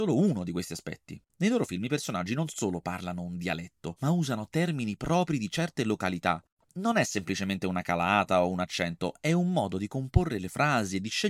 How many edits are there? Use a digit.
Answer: 1